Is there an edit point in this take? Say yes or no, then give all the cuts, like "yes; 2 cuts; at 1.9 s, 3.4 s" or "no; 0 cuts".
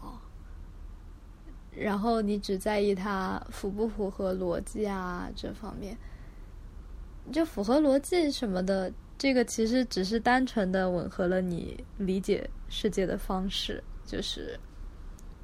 no; 0 cuts